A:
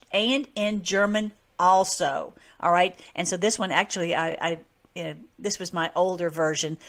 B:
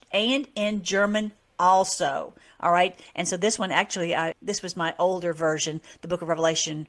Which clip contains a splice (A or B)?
B